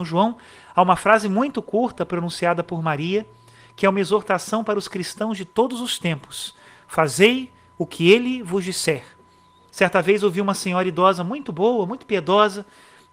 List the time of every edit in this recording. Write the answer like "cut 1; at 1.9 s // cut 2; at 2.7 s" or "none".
cut 1; at 9.7 s